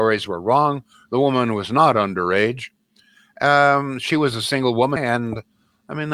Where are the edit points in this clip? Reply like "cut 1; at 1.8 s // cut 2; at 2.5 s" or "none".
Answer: cut 1; at 5.0 s